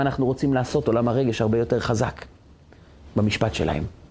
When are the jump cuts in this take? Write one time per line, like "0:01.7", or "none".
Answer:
0:03.1